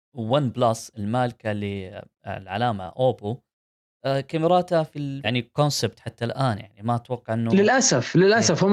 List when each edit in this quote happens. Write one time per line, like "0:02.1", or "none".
0:05.2